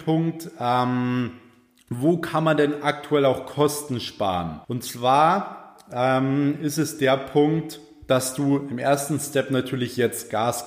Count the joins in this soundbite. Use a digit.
1